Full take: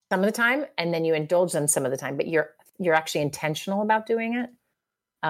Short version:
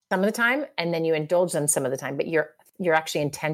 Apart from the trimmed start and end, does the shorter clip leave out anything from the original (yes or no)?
no